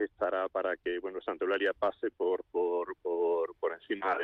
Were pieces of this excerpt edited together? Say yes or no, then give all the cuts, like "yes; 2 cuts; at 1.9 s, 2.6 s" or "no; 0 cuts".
no; 0 cuts